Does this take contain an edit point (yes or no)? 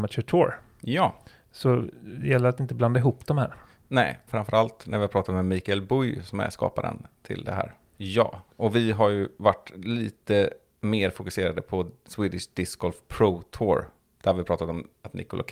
yes